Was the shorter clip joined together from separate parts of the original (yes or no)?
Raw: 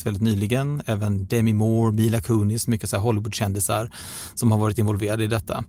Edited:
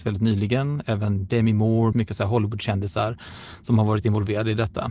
yes